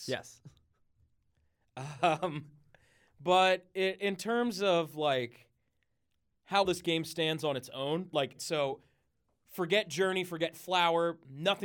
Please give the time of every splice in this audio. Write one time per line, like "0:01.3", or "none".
0:06.6
0:08.4